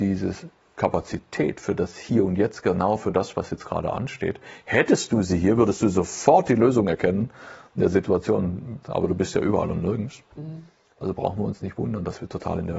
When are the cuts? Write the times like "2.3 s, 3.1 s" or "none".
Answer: 8.8 s